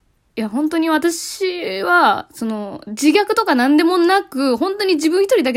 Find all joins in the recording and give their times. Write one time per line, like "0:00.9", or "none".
none